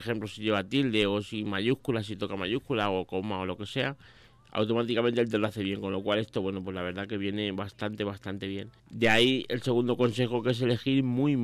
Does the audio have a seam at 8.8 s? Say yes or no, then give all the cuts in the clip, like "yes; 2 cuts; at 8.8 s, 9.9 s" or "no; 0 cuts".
yes; 1 cut; at 8.8 s